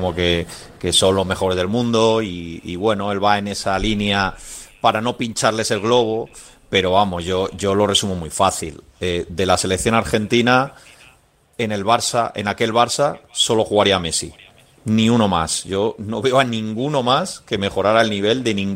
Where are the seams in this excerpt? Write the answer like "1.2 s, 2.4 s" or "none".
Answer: none